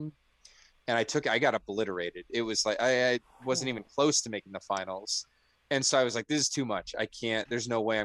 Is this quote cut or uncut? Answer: uncut